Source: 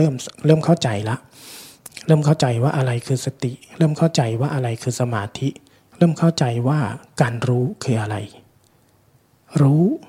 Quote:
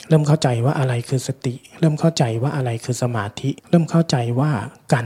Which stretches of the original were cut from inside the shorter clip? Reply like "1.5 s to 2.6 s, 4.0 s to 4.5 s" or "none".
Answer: 5.6 s to 5.9 s